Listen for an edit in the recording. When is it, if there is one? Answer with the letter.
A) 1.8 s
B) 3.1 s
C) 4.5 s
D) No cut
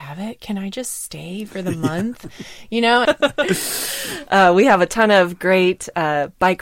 B